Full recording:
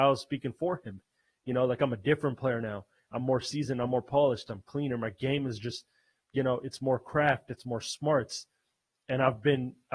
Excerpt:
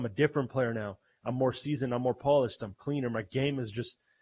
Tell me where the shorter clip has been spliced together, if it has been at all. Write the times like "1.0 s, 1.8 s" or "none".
none